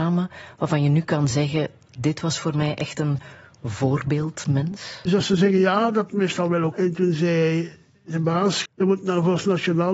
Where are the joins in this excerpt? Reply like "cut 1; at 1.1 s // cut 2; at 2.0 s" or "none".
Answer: cut 1; at 5.1 s // cut 2; at 6.7 s // cut 3; at 8.7 s